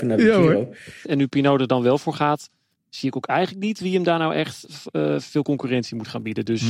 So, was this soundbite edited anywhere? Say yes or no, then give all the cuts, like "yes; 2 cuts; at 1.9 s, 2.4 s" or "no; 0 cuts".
yes; 1 cut; at 1.0 s